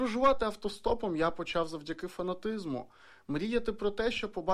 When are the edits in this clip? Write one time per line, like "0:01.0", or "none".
none